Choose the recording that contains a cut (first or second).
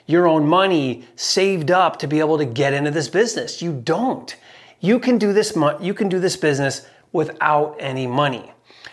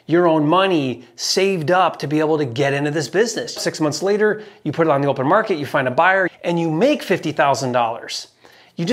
second